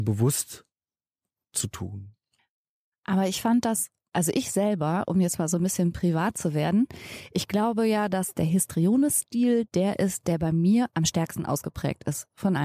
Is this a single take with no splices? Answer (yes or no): yes